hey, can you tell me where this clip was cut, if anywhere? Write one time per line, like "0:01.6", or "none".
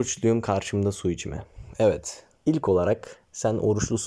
none